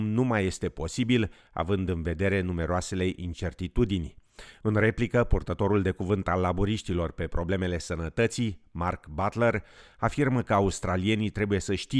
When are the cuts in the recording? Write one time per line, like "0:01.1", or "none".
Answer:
none